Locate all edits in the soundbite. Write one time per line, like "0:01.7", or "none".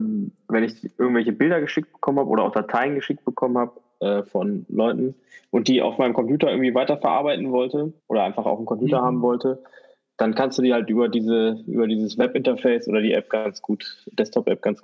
0:08.0